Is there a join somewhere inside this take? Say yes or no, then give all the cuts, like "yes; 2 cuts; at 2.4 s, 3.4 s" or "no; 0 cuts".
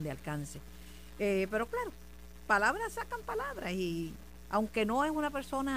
yes; 1 cut; at 4.4 s